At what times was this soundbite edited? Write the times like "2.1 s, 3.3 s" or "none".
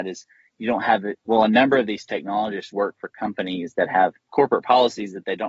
1.2 s, 4.2 s